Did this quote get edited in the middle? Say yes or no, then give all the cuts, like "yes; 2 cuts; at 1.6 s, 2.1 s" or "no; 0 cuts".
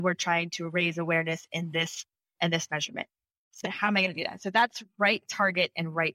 yes; 1 cut; at 3.6 s